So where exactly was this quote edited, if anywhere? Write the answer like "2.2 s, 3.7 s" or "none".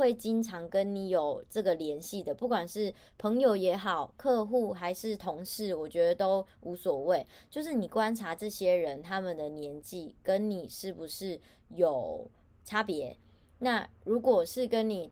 none

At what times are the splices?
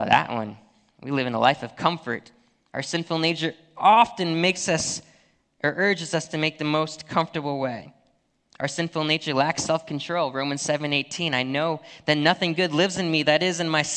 none

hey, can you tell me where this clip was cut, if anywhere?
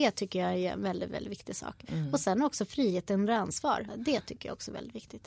3.9 s

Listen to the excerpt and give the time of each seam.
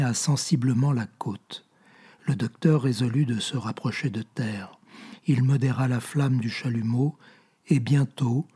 none

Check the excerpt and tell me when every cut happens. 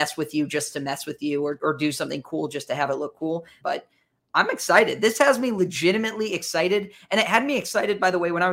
3.6 s

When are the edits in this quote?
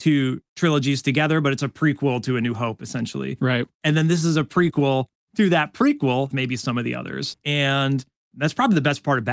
6.3 s, 7.3 s

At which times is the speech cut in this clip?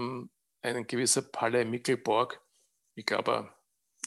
none

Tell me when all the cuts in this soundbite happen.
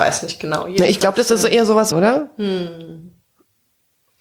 1.9 s

